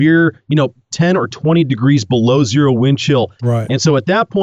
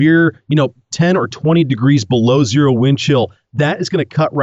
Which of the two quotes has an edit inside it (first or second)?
first